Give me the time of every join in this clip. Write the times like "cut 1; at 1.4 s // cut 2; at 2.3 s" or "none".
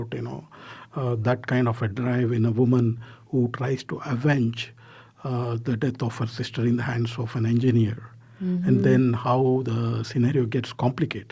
none